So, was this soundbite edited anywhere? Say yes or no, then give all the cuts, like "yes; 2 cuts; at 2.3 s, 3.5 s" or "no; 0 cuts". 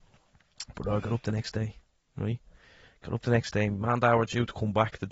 no; 0 cuts